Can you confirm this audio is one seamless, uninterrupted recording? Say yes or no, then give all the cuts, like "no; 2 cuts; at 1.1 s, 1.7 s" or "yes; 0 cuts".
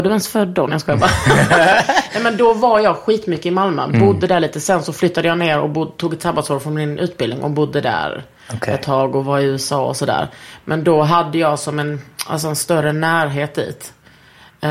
yes; 0 cuts